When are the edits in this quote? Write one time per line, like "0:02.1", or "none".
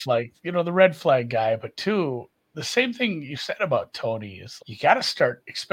0:04.6